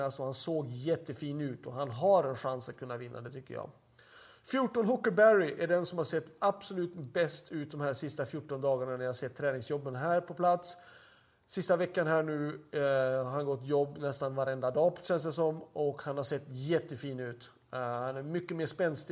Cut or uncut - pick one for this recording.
uncut